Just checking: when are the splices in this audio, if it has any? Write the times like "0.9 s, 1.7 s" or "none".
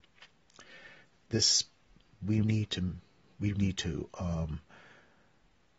2.4 s, 3.5 s